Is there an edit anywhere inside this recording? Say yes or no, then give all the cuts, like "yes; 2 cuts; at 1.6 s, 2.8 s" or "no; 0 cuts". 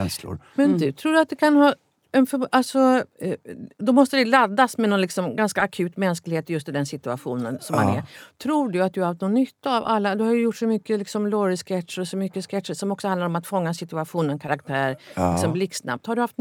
no; 0 cuts